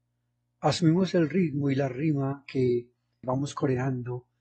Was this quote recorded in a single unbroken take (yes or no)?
no